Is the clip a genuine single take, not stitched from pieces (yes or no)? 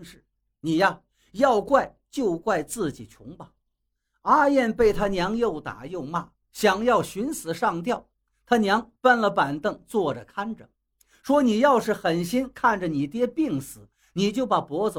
yes